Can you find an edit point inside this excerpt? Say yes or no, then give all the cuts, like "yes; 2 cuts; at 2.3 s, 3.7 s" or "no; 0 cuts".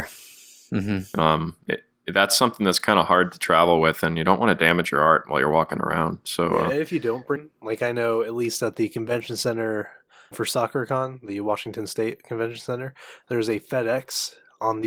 yes; 2 cuts; at 7.4 s, 10.3 s